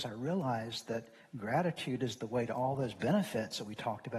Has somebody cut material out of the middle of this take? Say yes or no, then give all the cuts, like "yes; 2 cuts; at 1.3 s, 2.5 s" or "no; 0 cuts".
no; 0 cuts